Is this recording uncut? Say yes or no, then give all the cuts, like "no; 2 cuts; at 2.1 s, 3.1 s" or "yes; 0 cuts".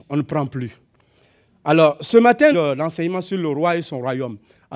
no; 1 cut; at 2.5 s